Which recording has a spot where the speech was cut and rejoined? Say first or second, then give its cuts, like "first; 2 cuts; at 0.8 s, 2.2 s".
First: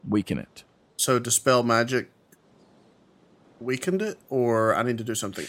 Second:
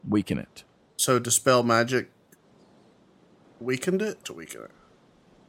second; 1 cut; at 4.2 s